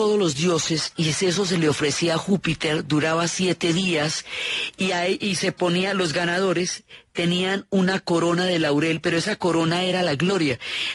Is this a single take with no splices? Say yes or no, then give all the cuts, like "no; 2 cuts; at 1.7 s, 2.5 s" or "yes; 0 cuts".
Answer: yes; 0 cuts